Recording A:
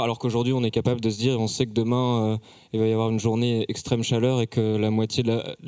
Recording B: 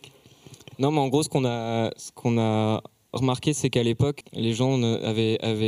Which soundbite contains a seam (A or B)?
B